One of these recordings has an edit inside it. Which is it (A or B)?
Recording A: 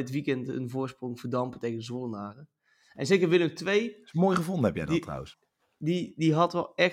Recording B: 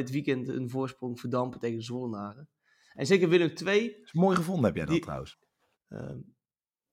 B